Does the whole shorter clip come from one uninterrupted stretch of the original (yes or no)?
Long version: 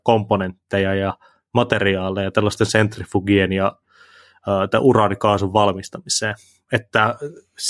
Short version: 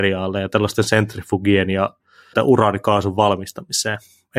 no